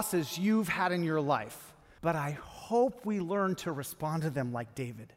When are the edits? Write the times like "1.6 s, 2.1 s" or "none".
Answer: 2.0 s